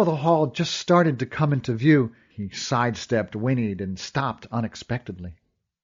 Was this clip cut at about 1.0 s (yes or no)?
no